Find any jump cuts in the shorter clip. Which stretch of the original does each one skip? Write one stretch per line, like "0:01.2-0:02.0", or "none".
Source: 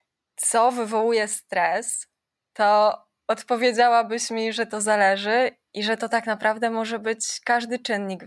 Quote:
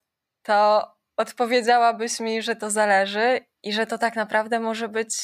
none